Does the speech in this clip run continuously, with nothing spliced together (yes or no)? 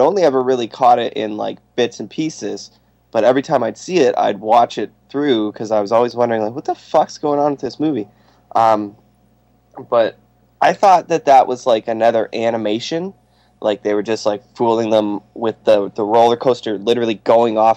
yes